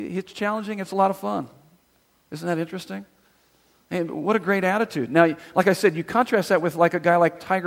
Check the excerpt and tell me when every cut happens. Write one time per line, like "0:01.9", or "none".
none